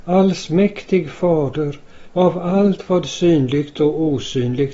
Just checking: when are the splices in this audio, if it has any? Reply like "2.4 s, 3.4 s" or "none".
2.1 s